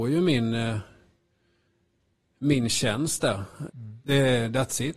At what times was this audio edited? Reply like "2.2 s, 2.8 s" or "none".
3.7 s